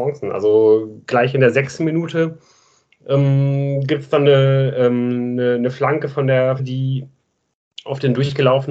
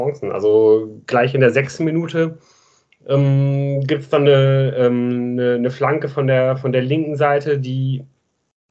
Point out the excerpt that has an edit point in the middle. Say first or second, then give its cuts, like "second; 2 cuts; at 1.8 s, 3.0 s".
first; 1 cut; at 6.6 s